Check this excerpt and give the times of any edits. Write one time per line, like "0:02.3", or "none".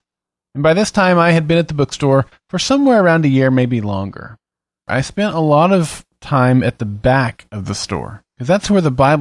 0:04.9